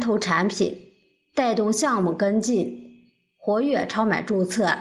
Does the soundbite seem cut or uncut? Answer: uncut